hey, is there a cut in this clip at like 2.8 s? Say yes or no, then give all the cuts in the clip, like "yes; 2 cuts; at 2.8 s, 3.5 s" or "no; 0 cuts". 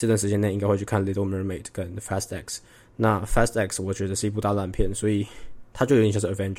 no; 0 cuts